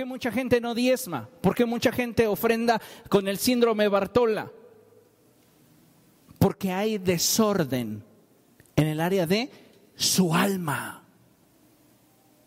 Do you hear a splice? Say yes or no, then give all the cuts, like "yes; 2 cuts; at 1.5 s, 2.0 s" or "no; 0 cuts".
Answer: no; 0 cuts